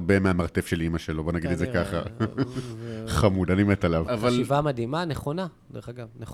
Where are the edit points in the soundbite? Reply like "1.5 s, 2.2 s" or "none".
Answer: 4.1 s